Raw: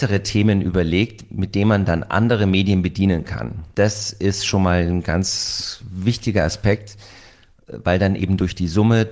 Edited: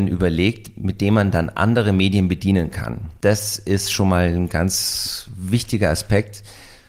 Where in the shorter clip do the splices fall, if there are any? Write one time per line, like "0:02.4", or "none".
none